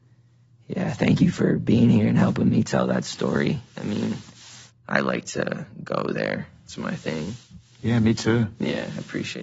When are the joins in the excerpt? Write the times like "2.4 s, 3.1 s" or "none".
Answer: none